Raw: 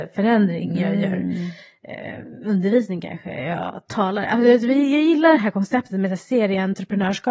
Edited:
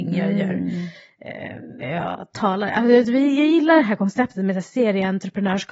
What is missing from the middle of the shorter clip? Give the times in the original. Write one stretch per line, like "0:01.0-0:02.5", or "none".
0:02.4-0:03.3